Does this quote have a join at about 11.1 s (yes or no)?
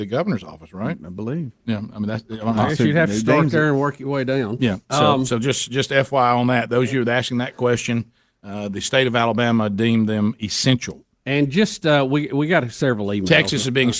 no